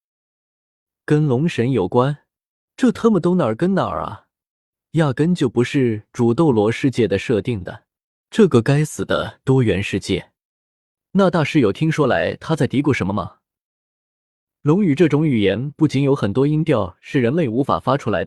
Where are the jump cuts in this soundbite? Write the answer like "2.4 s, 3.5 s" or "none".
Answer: 2.7 s